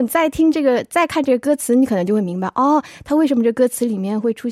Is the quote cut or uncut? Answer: uncut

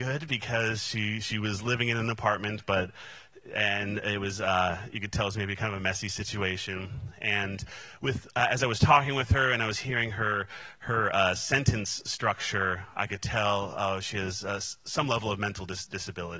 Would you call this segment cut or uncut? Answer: uncut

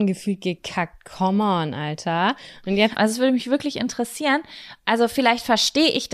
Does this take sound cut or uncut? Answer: cut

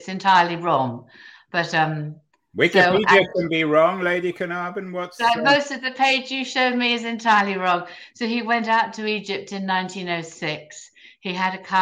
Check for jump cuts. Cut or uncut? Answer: uncut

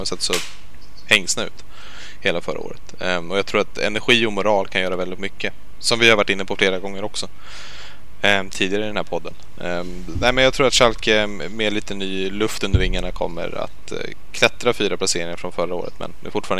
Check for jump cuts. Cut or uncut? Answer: uncut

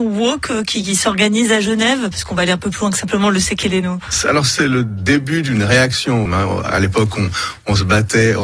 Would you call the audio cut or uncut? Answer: cut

